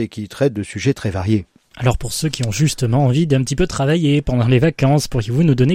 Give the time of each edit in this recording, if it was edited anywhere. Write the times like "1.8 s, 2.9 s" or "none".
none